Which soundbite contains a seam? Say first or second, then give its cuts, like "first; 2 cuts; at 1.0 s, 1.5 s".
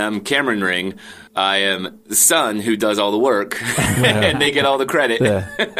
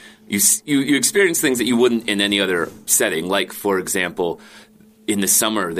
first; 1 cut; at 1.3 s